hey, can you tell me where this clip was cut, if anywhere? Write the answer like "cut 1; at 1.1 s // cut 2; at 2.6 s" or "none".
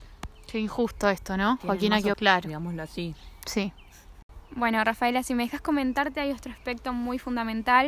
cut 1; at 2.1 s